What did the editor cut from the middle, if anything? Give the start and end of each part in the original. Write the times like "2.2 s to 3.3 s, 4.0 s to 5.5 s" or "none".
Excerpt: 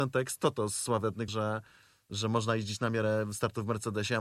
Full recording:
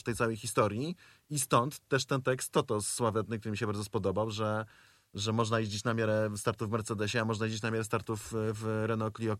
3.4 s to 4.3 s